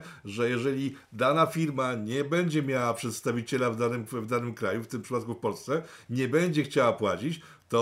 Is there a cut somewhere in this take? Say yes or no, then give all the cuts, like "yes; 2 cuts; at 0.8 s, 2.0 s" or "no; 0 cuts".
yes; 1 cut; at 4.1 s